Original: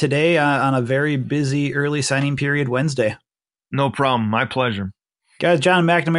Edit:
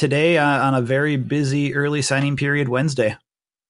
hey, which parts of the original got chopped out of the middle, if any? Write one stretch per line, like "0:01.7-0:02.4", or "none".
none